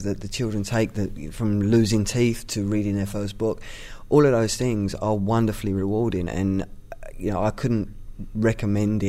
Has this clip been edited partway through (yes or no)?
no